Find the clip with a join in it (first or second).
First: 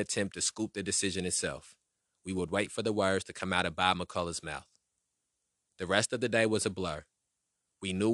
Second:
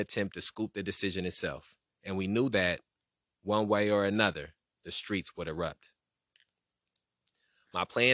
second